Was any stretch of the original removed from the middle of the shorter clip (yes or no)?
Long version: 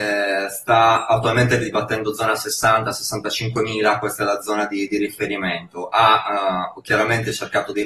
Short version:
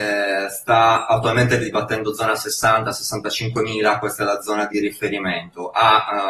yes